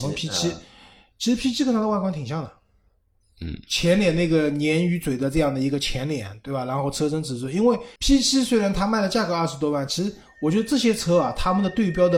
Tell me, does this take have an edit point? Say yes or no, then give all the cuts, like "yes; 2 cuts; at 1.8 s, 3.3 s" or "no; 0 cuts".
yes; 1 cut; at 8.0 s